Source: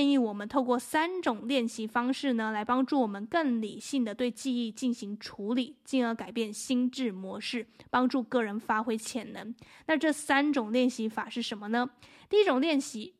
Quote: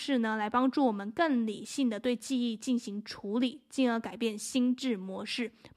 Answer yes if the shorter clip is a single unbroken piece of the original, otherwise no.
yes